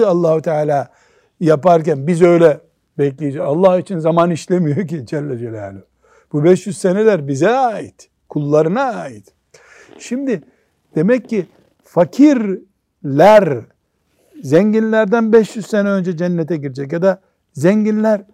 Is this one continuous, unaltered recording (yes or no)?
yes